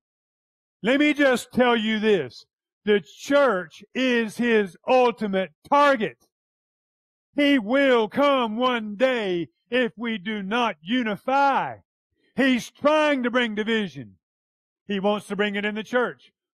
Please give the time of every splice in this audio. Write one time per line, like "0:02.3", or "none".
none